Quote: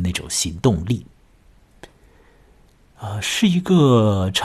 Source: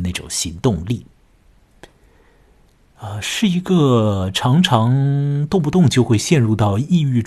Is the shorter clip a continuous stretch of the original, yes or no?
yes